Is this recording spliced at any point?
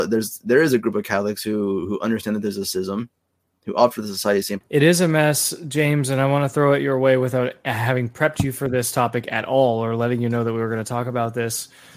yes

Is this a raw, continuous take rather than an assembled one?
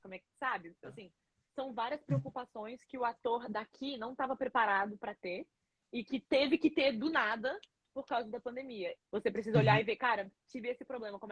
no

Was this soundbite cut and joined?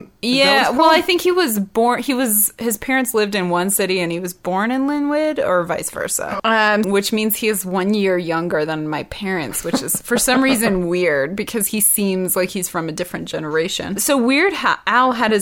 yes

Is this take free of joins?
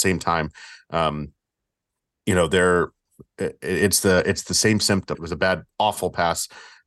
no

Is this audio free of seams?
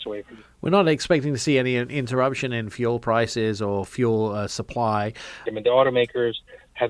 no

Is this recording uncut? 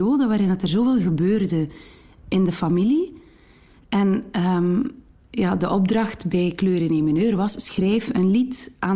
yes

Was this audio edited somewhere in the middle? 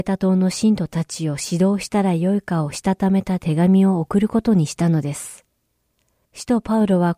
yes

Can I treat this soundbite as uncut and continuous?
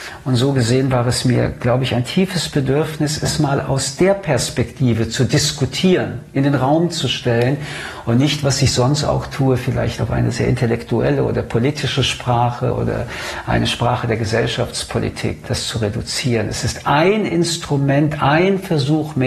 yes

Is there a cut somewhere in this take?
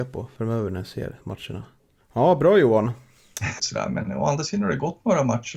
yes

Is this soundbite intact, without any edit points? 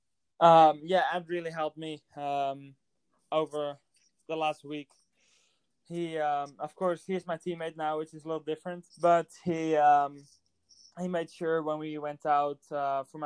no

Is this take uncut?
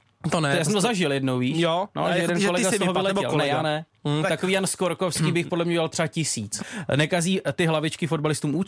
no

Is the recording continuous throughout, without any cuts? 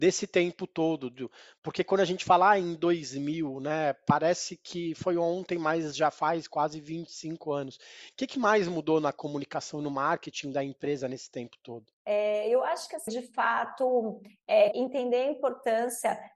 no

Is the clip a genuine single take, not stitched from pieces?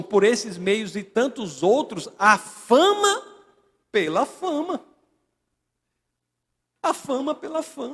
yes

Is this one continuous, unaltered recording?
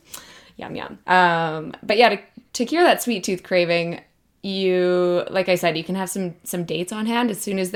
no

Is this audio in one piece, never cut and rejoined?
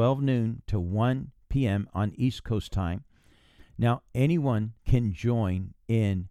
no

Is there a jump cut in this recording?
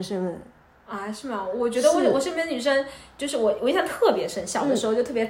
no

